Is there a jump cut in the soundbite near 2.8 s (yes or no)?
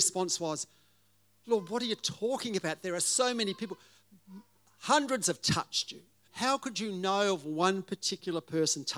no